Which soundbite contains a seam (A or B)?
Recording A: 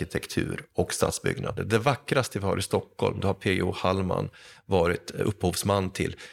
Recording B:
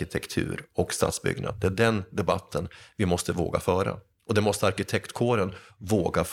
A